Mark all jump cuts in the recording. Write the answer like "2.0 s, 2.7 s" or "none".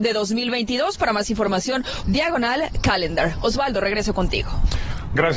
2.0 s